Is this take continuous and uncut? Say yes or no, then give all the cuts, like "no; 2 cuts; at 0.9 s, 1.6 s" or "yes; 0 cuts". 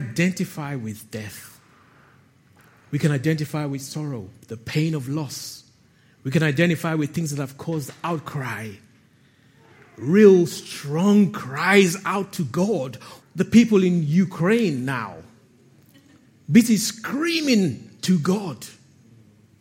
no; 1 cut; at 13.2 s